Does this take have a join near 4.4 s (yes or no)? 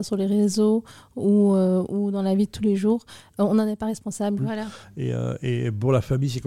yes